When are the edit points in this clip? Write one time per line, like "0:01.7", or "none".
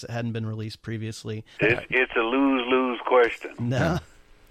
0:01.6
0:03.6